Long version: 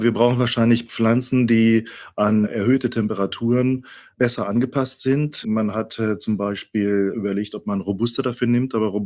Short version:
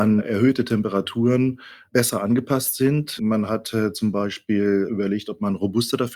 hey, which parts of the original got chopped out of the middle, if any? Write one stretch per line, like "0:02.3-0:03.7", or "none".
none

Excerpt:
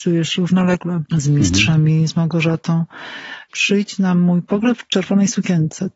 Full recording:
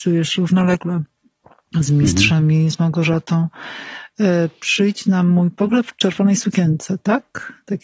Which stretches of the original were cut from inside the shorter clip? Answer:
0:01.1-0:01.7
0:04.1-0:04.6

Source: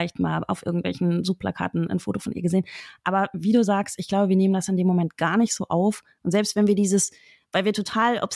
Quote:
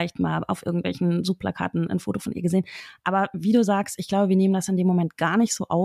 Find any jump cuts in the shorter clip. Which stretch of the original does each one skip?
none

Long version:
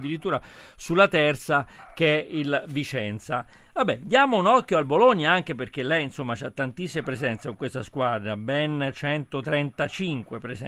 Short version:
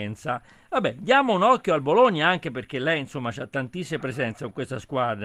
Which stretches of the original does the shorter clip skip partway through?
none

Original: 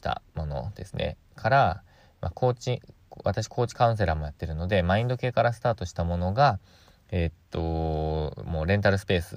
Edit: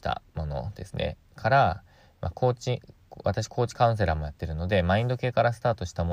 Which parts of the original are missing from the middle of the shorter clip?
none

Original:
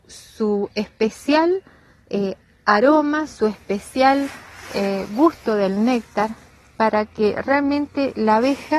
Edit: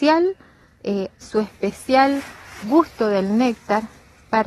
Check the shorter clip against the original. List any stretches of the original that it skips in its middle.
0:02.5-0:03.3
0:04.7-0:05.1

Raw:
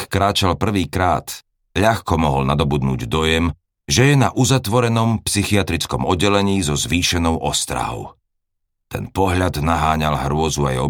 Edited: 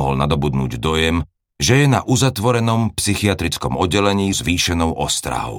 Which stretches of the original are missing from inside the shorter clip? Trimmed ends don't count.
0:06.6-0:06.8

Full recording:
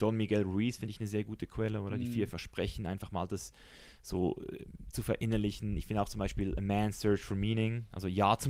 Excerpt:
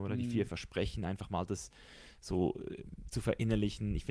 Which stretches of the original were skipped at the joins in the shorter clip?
none

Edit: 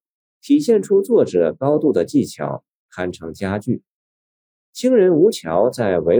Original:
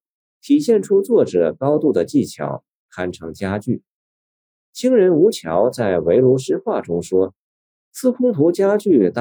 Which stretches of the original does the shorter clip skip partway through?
none

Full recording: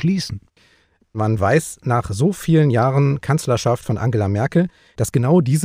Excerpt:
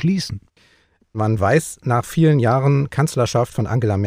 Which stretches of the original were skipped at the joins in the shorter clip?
0:02.0-0:02.3

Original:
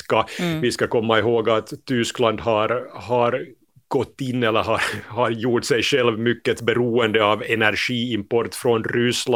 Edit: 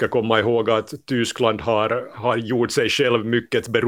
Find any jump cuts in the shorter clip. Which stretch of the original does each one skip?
0:02.9-0:05.1

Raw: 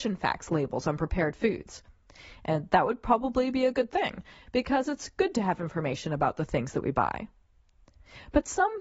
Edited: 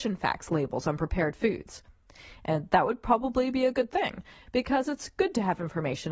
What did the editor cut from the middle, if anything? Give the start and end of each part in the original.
none

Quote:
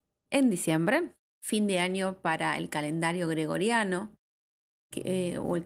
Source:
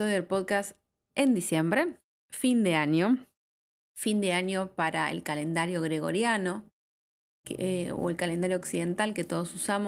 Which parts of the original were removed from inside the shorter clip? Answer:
0:02.1-0:03.8

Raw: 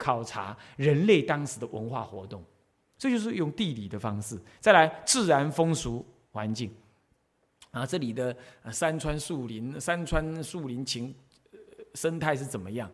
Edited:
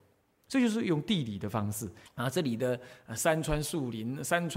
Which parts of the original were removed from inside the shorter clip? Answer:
0:04.6-0:07.6

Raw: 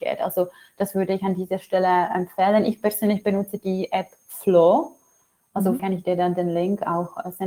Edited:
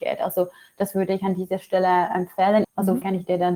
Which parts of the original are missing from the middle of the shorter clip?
0:02.6-0:05.4

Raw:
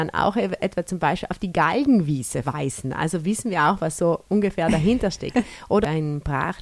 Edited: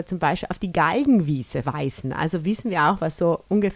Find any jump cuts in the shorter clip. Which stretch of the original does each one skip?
none

